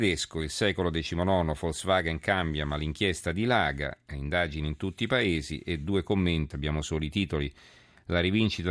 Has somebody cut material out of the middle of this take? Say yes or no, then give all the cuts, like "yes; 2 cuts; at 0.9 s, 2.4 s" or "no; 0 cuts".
yes; 1 cut; at 6.5 s